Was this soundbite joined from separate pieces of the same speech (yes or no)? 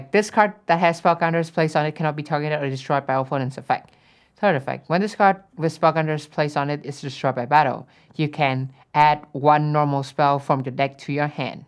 no